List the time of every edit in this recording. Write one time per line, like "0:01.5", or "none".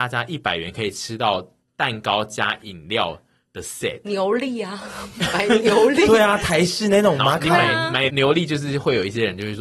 0:08.1